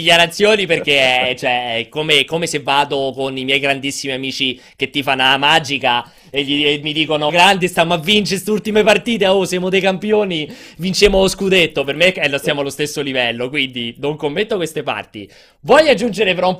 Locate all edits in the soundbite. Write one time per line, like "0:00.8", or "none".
0:07.3